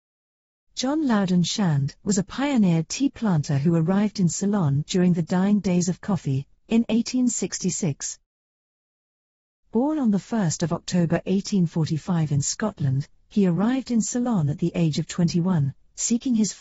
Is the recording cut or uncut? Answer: uncut